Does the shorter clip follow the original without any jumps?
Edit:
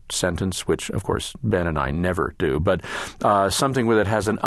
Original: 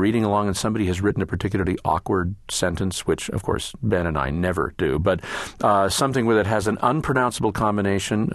yes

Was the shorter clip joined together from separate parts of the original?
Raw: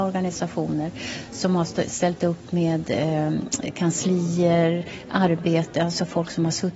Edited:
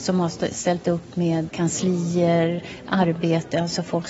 yes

